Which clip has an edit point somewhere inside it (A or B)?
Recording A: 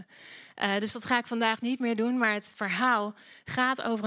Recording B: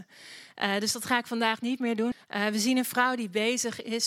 B